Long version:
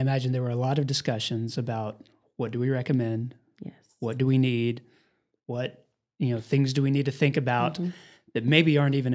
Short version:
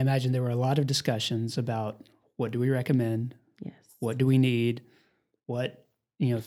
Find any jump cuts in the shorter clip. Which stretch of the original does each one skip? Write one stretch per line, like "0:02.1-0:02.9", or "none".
none